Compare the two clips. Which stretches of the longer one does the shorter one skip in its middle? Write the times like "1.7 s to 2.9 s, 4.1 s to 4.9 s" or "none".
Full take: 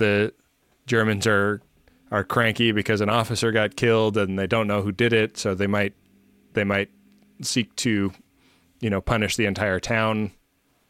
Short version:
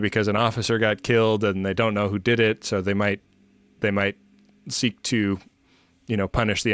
none